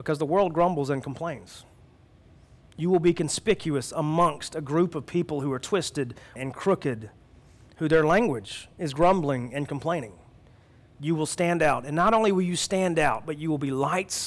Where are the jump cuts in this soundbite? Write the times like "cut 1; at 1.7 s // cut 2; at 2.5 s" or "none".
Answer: cut 1; at 6.4 s